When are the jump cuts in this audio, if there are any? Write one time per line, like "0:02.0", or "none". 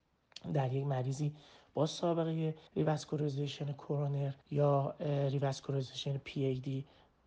0:02.7
0:04.4